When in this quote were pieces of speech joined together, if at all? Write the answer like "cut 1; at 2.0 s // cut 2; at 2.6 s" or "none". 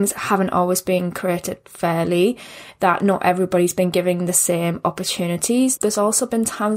cut 1; at 5.8 s